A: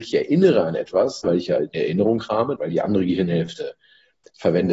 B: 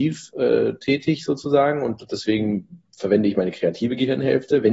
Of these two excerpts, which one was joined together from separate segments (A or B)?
A